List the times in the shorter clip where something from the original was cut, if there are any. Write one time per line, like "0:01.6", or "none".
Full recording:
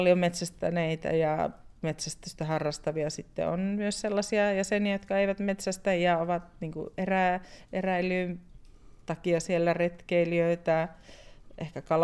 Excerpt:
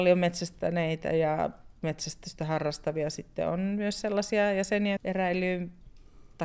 0:05.0